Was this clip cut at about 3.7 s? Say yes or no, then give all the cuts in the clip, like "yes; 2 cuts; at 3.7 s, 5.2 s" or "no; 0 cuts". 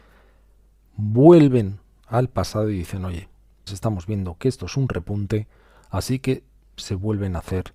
yes; 1 cut; at 3.7 s